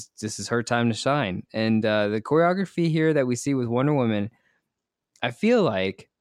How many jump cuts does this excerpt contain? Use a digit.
0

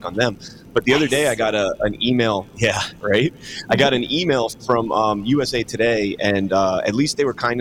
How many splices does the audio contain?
0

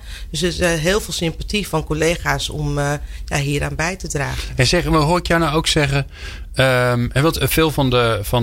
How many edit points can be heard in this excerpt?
0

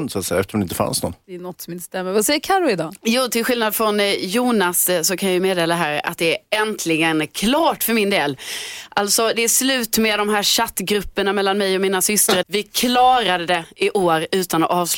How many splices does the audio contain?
1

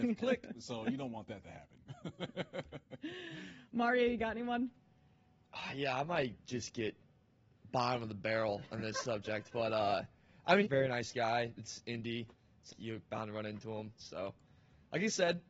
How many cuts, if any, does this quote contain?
3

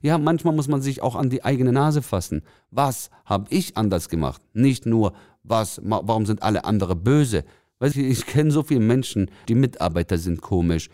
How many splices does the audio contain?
2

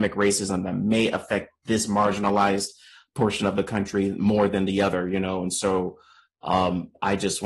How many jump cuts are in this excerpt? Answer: 0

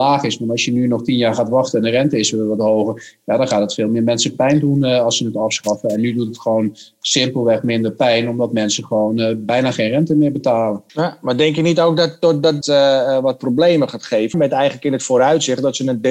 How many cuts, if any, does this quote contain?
3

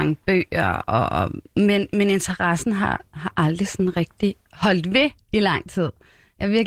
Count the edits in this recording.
0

